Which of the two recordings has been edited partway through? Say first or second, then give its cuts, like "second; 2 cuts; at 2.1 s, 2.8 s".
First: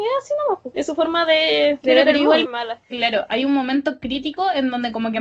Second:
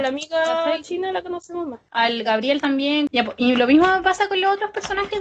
first; 1 cut; at 2.5 s